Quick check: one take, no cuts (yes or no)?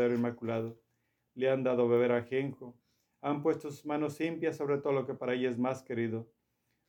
yes